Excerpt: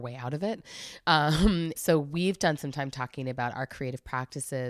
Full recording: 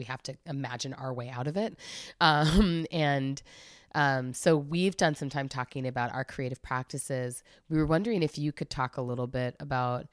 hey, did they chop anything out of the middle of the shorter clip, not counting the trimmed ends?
yes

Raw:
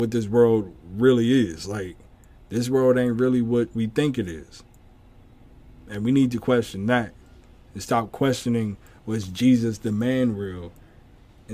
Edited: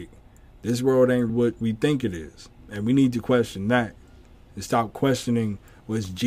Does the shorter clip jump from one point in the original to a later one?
yes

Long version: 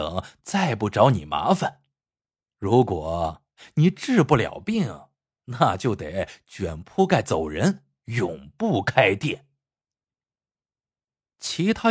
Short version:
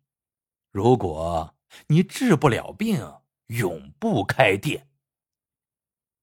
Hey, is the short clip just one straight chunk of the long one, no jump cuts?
no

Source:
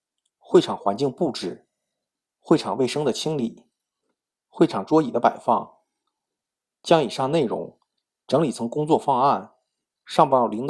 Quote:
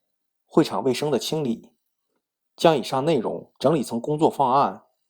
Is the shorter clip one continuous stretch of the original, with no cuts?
no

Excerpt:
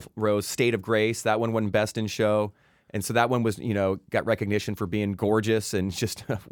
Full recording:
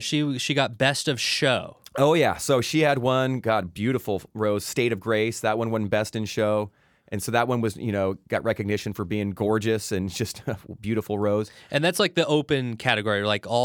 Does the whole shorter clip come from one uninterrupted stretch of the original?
yes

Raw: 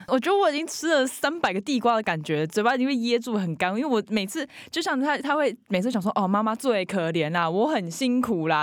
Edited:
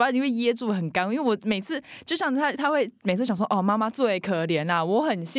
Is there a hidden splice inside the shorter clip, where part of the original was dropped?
no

